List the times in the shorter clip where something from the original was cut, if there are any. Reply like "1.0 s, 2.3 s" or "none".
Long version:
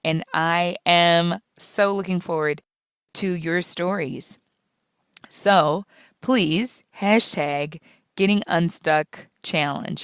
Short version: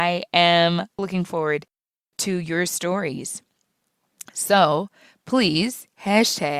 1.0 s